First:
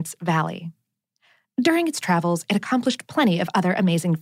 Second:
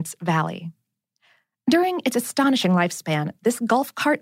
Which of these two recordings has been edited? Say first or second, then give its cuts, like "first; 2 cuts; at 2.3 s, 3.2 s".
first; 1 cut; at 1.4 s